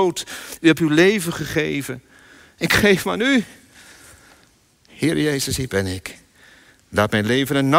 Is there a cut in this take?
no; 0 cuts

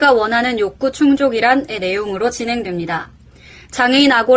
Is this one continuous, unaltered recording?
yes; 0 cuts

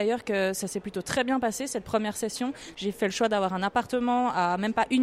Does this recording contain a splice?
no; 0 cuts

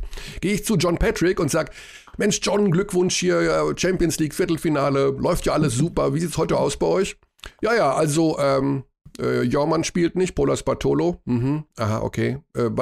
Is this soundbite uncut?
yes; 0 cuts

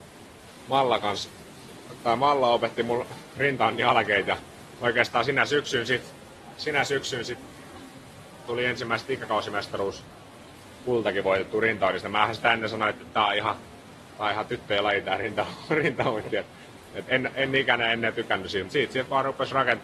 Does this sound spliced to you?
yes; 2 cuts; at 17.1 s, 18.7 s

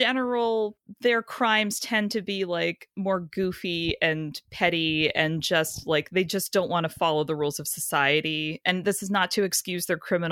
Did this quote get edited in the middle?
no; 0 cuts

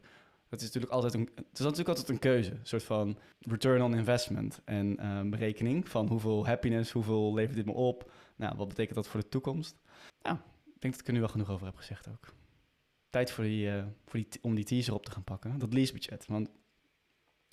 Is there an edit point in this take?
no; 0 cuts

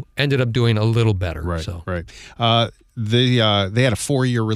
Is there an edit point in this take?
no; 0 cuts

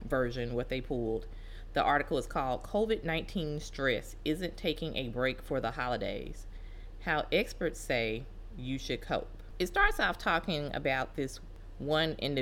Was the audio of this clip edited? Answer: no; 0 cuts

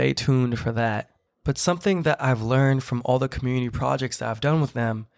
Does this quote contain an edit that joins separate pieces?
no; 0 cuts

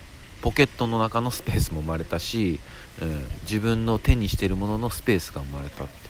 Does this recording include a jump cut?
no; 0 cuts

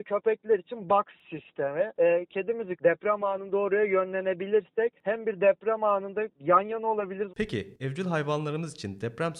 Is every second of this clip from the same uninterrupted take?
no; 2 cuts; at 2.8 s, 7.3 s

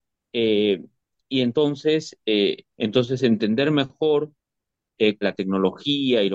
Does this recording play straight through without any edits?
no; 2 cuts; at 2.7 s, 5.2 s

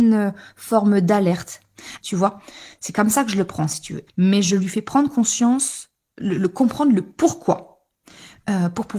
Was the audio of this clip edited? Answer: yes; 2 cuts; at 2.0 s, 4.1 s

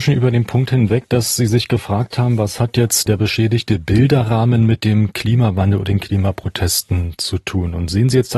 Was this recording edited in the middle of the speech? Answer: yes; 1 cut; at 3.1 s

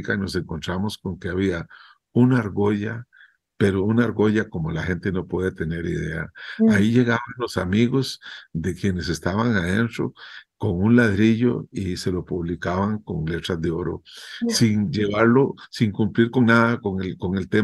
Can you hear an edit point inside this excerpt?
no; 0 cuts

